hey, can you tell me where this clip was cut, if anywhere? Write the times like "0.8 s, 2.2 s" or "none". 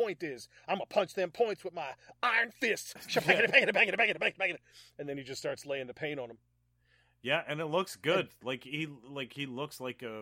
none